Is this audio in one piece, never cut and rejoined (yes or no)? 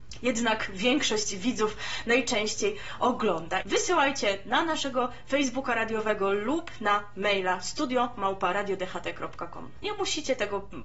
no